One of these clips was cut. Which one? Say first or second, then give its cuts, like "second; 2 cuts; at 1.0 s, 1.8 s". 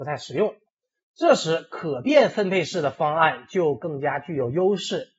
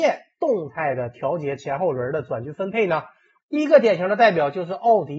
second; 1 cut; at 3.4 s